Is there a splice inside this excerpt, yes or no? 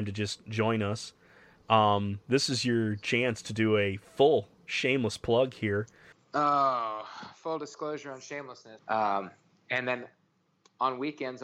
yes